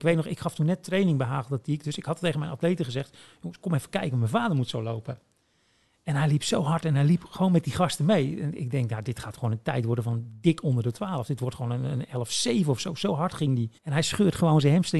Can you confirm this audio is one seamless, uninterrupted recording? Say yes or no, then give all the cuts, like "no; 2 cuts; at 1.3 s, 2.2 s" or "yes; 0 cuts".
no; 1 cut; at 13.8 s